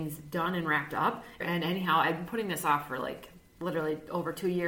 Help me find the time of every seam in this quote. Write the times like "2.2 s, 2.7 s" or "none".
1.4 s

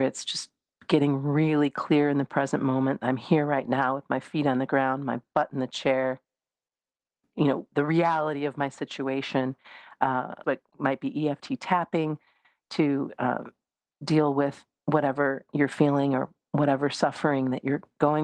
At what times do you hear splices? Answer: 10.4 s

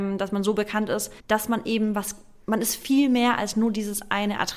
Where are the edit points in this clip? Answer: 1.2 s

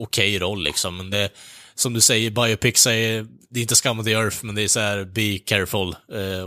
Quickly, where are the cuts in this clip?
none

